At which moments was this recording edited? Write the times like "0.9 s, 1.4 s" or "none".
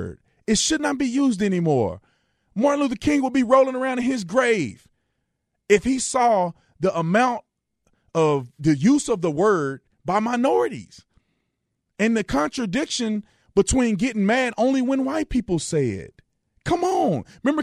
8.6 s